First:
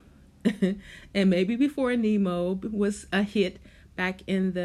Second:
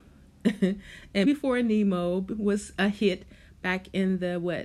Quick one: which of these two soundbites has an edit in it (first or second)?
second